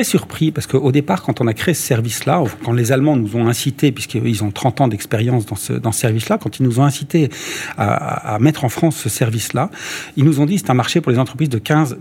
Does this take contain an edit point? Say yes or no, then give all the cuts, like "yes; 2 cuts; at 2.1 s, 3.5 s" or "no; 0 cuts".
no; 0 cuts